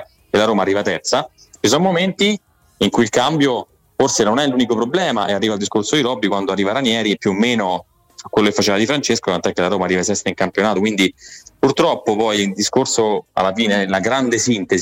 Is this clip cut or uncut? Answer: uncut